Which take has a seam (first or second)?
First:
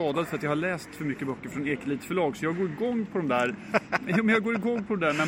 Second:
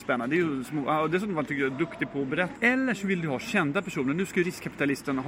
second